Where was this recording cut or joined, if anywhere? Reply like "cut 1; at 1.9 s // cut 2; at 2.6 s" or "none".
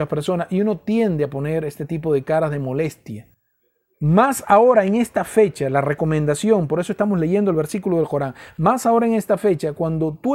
cut 1; at 3.9 s